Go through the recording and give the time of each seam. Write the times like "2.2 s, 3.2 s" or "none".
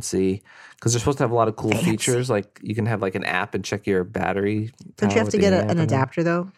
none